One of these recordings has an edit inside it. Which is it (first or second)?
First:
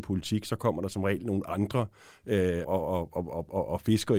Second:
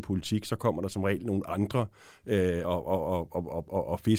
first